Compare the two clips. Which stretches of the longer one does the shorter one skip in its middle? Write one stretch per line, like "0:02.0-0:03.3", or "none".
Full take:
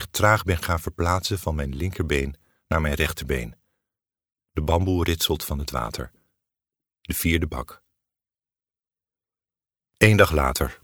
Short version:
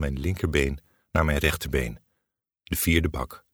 0:04.0-0:06.8